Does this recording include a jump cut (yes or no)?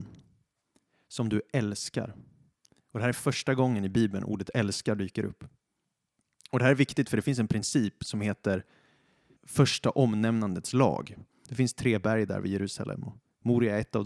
yes